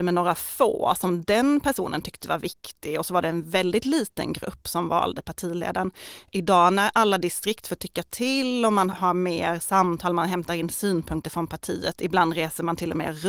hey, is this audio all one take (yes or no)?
no